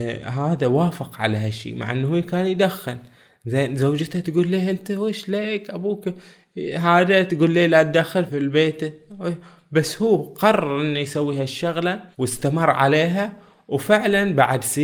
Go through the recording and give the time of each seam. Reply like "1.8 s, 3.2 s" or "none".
8.3 s, 12.1 s